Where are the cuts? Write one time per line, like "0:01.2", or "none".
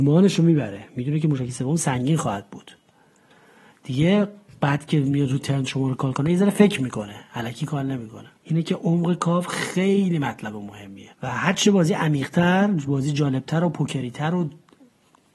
0:08.4
0:11.1